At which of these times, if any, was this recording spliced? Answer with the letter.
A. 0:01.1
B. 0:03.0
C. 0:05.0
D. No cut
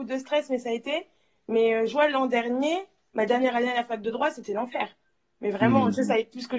D